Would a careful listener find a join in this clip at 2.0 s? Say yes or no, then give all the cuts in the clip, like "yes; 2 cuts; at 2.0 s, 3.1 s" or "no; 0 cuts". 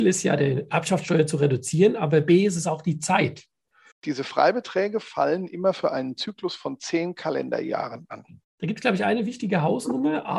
no; 2 cuts; at 3.9 s, 8.4 s